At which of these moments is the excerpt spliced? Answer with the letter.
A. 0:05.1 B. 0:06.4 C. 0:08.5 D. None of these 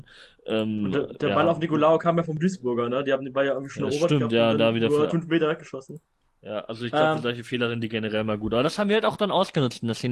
A